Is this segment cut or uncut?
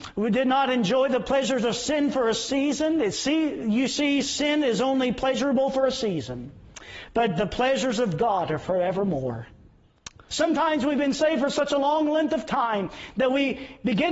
cut